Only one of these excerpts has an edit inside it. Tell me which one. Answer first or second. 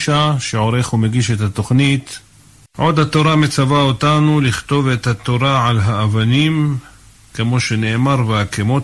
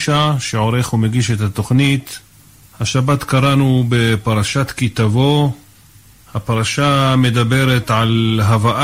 first